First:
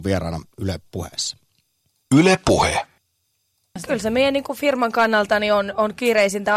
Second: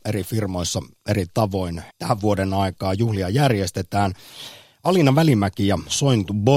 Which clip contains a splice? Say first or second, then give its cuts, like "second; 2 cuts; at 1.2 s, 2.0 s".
second; 1 cut; at 1.9 s